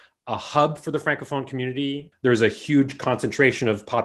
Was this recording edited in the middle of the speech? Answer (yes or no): yes